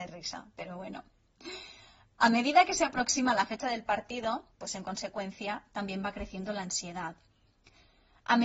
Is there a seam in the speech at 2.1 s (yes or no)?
no